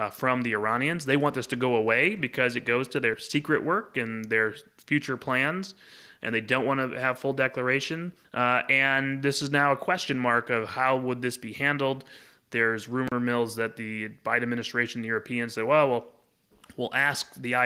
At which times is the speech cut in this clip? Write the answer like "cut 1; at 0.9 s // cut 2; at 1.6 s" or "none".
cut 1; at 8.2 s